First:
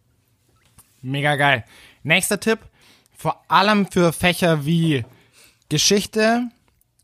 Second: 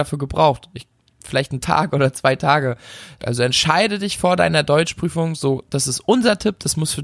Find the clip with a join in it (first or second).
second